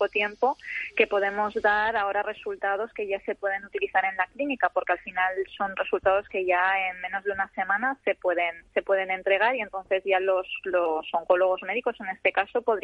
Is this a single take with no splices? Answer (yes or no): yes